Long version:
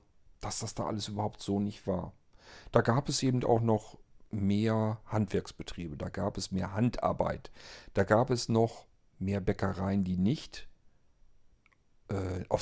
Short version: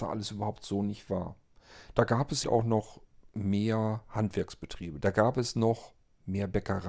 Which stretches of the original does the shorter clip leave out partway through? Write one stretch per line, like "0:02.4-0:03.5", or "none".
0:03.2-0:03.4
0:06.0-0:07.9